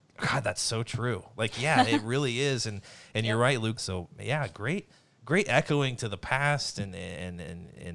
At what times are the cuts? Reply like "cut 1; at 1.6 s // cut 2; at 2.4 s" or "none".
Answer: cut 1; at 3.8 s